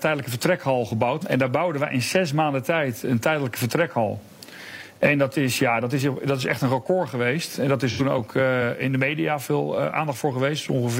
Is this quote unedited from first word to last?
no; 1 cut; at 1.2 s

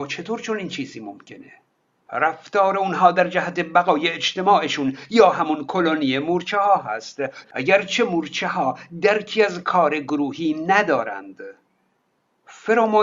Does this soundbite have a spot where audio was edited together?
yes; 2 cuts; at 2.1 s, 7.4 s

